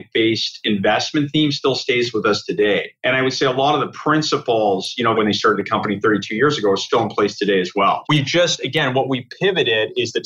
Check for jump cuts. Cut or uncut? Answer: cut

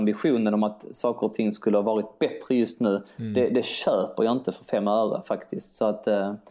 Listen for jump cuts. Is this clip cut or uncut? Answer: uncut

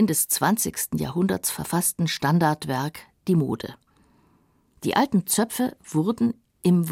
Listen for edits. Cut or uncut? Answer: cut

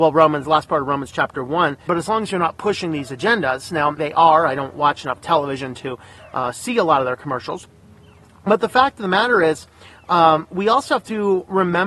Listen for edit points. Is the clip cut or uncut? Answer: cut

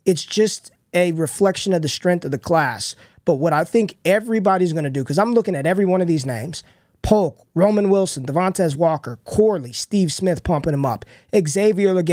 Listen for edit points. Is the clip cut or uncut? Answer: uncut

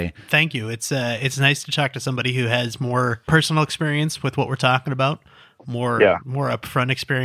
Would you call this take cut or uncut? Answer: uncut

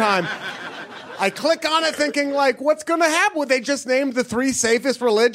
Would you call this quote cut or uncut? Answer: uncut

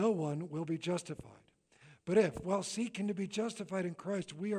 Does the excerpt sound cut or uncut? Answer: uncut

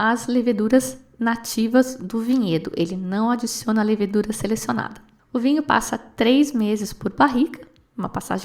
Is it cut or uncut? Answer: uncut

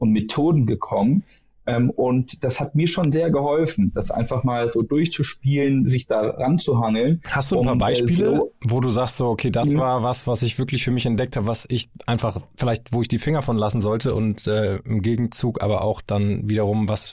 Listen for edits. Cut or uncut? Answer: uncut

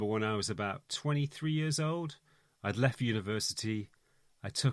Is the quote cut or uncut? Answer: uncut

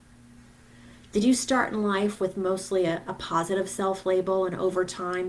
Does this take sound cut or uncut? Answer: uncut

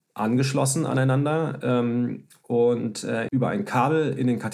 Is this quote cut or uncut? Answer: cut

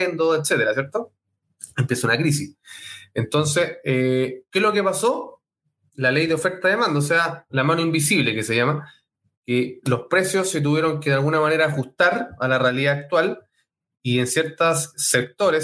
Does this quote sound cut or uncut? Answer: uncut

